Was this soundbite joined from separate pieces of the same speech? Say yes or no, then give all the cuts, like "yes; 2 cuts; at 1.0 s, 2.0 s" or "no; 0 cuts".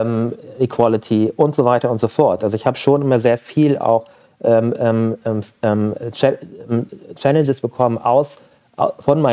no; 0 cuts